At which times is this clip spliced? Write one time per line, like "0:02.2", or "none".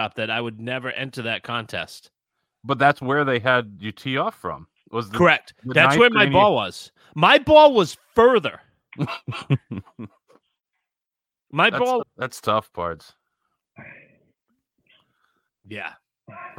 0:12.0
0:15.5